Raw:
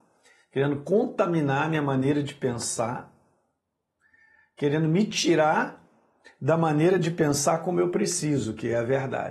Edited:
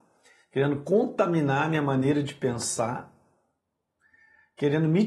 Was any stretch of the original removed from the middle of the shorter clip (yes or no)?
no